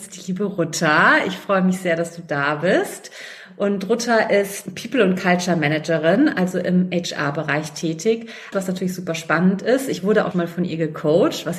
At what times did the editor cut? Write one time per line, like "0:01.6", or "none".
0:08.5
0:10.3